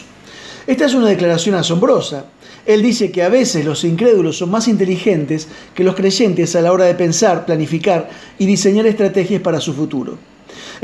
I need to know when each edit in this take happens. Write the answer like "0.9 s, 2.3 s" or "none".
none